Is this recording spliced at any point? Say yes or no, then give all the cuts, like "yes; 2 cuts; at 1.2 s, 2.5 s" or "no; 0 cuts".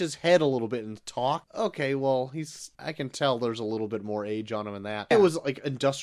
yes; 3 cuts; at 1.4 s, 2.7 s, 5.1 s